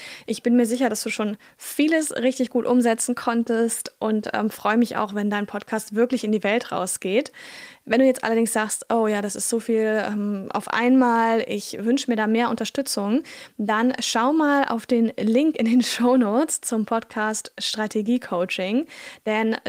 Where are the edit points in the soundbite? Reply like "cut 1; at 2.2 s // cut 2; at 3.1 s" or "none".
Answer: none